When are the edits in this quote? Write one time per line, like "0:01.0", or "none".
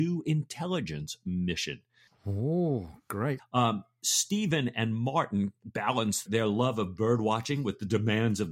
0:02.1
0:03.4